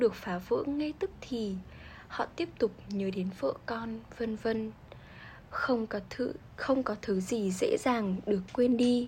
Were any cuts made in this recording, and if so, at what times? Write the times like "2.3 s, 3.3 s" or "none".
5.5 s